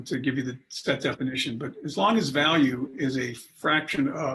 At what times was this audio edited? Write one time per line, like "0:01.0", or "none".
none